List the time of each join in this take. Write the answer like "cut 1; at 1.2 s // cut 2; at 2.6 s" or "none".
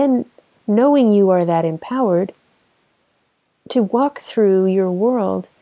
none